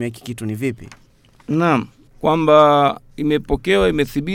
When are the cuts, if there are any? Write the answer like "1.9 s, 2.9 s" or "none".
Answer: 2.1 s